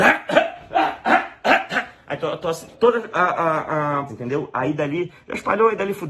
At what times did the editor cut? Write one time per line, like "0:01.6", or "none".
0:02.7
0:04.1